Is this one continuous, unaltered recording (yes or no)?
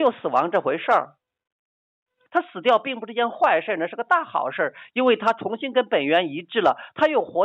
no